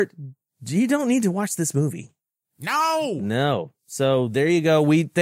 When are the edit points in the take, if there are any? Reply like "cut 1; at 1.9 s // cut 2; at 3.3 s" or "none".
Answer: none

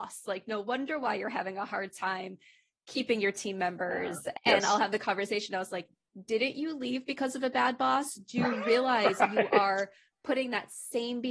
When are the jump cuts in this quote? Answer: cut 1; at 4.4 s

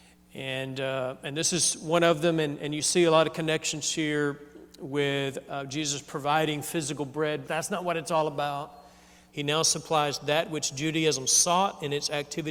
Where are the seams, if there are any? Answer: cut 1; at 7.4 s // cut 2; at 9.3 s

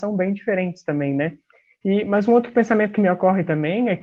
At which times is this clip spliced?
cut 1; at 1.8 s

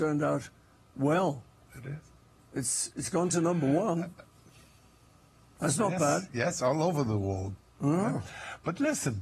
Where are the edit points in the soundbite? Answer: none

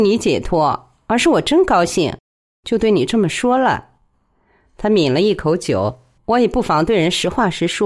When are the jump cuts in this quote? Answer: cut 1; at 6.2 s

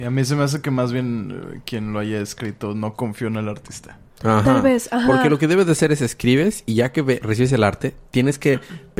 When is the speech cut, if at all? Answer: none

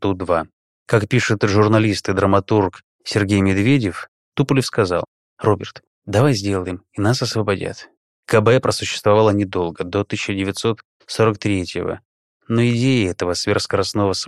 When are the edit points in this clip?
cut 1; at 8.1 s

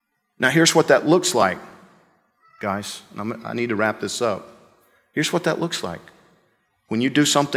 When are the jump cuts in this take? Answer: none

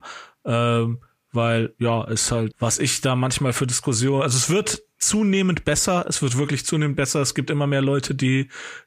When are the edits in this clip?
cut 1; at 2.5 s

